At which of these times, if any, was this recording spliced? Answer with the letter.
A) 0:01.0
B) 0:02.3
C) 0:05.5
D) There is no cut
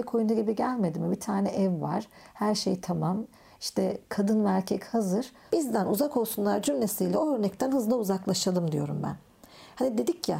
C